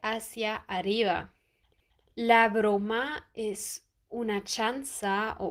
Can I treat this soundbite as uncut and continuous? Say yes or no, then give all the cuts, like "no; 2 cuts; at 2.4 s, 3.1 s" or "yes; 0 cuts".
yes; 0 cuts